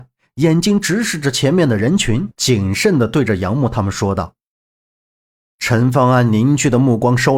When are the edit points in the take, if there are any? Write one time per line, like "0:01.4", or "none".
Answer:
none